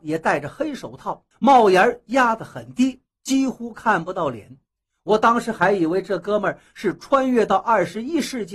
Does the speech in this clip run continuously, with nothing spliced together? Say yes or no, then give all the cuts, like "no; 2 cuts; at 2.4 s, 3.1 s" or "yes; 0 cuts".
no; 1 cut; at 1.3 s